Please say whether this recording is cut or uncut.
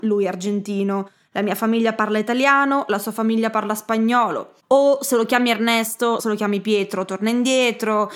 cut